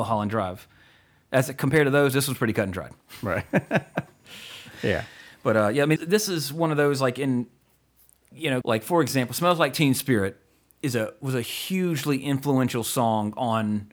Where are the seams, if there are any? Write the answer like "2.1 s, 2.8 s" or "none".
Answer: 6.0 s, 8.6 s